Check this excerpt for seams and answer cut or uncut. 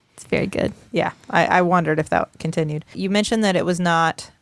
cut